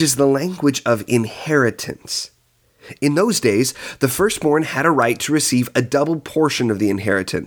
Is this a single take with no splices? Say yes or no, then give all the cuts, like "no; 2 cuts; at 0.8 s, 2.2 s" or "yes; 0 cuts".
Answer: yes; 0 cuts